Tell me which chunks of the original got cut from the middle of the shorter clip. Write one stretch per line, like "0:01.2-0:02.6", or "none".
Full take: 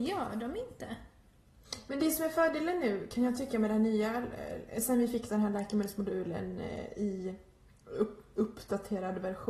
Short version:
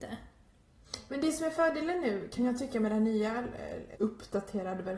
0:04.7-0:08.3